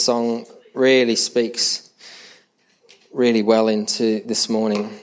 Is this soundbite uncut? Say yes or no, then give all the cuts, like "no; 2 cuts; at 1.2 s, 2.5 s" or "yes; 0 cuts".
yes; 0 cuts